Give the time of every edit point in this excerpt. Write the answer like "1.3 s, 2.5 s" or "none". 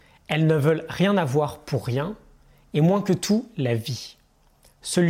none